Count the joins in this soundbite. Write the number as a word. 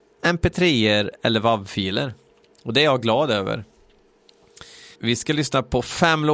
one